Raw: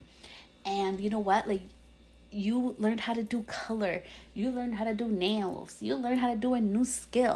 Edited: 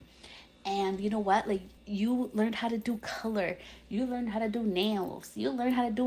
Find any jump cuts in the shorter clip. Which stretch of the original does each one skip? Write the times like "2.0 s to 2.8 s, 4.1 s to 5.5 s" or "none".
1.8 s to 2.2 s